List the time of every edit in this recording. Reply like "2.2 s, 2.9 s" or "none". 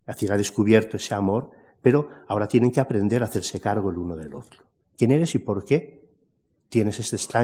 4.9 s